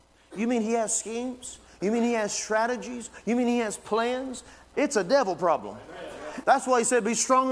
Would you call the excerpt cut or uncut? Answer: cut